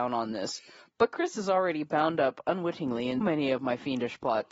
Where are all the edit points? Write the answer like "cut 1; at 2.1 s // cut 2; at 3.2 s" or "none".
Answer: cut 1; at 3.2 s

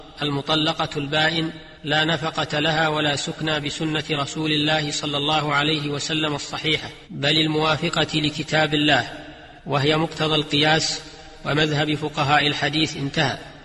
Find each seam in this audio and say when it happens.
cut 1; at 1.8 s // cut 2; at 7.0 s // cut 3; at 9.6 s

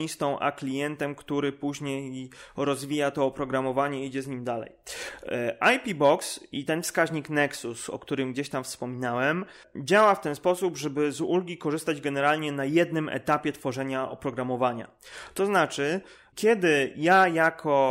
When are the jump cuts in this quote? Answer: none

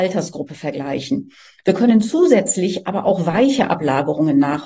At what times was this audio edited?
none

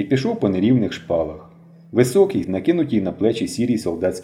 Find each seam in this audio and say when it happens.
cut 1; at 2.4 s

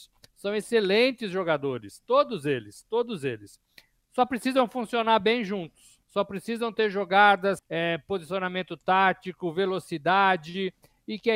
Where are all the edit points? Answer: cut 1; at 6.0 s // cut 2; at 7.6 s

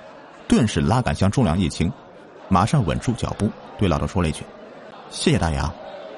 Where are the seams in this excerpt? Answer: cut 1; at 2.4 s

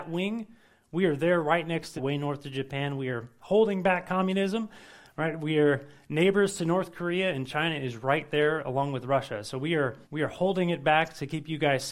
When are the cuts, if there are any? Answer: cut 1; at 2.0 s // cut 2; at 10.0 s

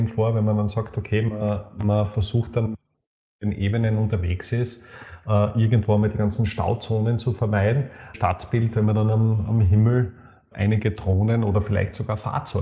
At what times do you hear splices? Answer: cut 1; at 8.1 s // cut 2; at 10.5 s

